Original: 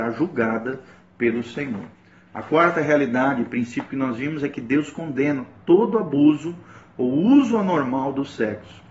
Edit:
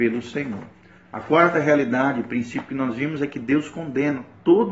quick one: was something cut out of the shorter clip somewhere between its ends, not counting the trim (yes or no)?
no